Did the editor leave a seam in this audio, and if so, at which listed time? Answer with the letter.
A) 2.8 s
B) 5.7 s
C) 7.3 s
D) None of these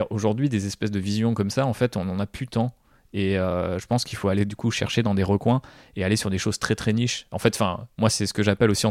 D